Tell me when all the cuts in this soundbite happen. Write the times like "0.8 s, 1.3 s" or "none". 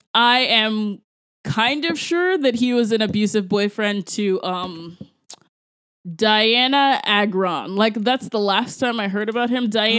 none